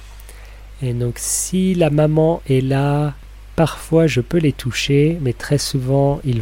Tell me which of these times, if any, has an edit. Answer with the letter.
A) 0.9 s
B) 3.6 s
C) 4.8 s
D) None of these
D